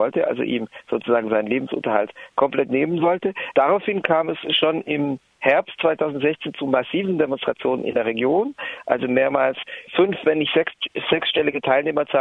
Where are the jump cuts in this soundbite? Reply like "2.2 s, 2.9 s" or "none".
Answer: 3.5 s, 9.9 s

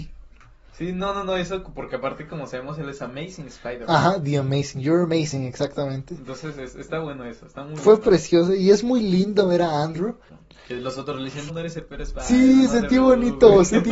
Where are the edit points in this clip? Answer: 10.3 s, 11.5 s

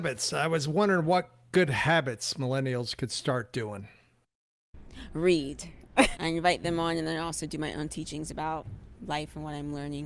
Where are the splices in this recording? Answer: 6.1 s

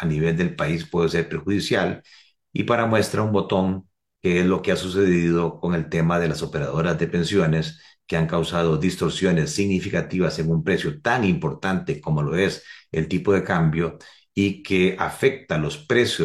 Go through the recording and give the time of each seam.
none

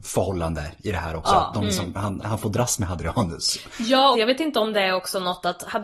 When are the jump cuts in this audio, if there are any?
2.2 s, 4.1 s

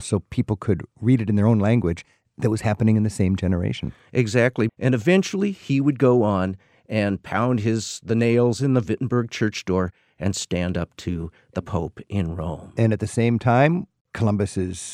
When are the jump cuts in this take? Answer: 4.7 s

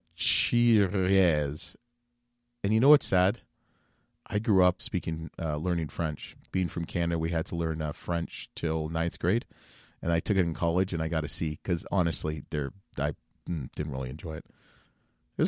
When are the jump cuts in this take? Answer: 4.8 s

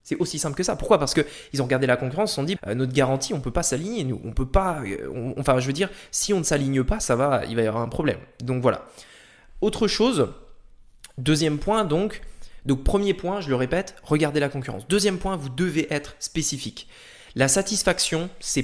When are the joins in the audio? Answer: 2.6 s

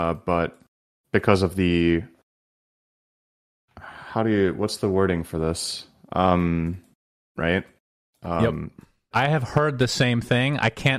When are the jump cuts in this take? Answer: 7.4 s, 9.1 s

